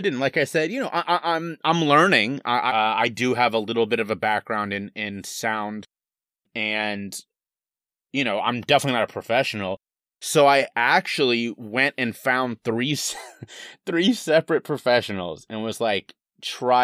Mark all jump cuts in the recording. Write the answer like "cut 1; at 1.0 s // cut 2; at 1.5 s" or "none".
cut 1; at 2.7 s